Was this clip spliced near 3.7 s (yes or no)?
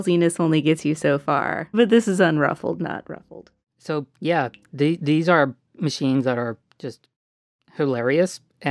no